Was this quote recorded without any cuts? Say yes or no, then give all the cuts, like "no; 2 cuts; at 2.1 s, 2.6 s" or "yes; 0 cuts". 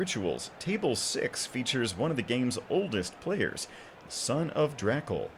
no; 1 cut; at 4.1 s